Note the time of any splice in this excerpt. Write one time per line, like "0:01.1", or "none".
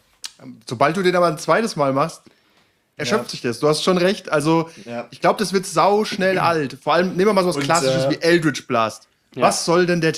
none

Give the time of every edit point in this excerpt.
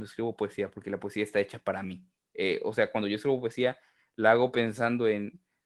none

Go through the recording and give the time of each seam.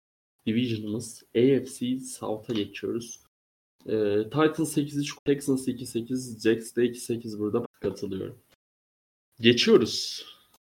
0:05.2
0:07.6

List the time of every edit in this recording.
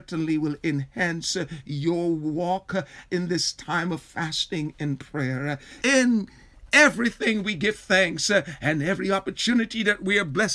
0:05.8

